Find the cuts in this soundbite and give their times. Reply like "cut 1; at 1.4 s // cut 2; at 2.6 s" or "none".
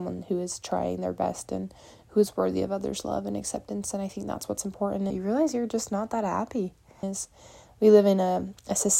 cut 1; at 5.1 s // cut 2; at 7.0 s